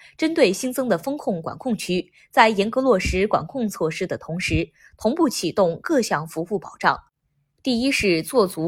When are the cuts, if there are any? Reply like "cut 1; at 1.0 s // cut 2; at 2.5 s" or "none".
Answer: none

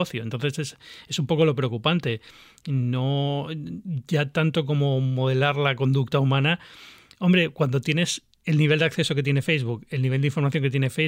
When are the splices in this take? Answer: none

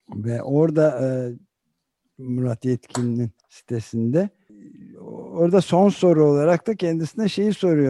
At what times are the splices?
cut 1; at 3.4 s

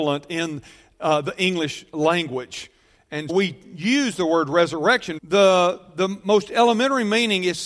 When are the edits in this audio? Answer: cut 1; at 3.3 s // cut 2; at 5.2 s

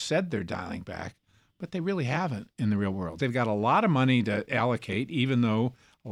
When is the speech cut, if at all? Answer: cut 1; at 3.2 s

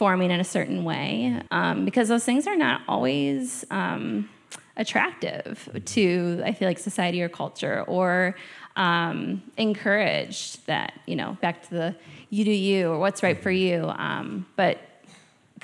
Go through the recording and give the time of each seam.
cut 1; at 1.5 s // cut 2; at 11.4 s

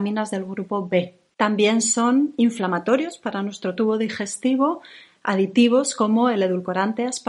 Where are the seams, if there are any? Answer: cut 1; at 1.3 s

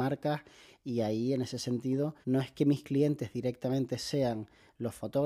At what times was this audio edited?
cut 1; at 2.2 s

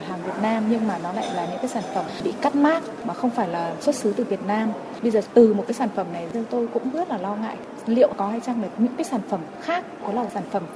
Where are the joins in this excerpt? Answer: none

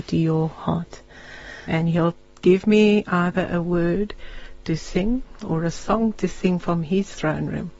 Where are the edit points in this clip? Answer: cut 1; at 1.7 s

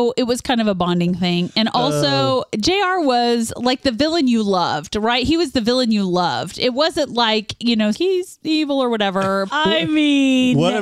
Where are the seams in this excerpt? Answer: cut 1; at 7.9 s // cut 2; at 9.5 s

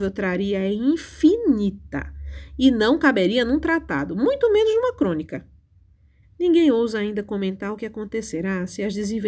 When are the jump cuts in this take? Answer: cut 1; at 6.2 s

